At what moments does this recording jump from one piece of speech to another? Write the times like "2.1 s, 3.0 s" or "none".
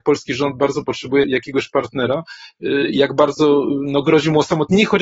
1.2 s